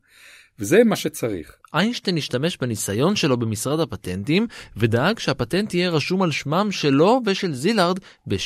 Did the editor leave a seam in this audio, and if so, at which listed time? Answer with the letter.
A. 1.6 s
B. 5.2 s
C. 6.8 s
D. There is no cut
A